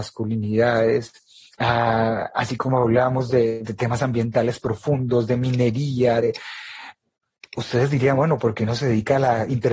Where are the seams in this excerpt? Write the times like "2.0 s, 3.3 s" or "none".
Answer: none